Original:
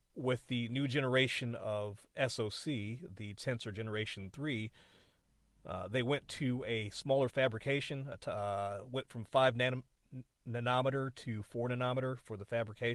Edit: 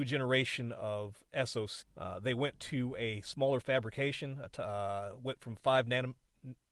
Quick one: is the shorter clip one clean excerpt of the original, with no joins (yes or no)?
no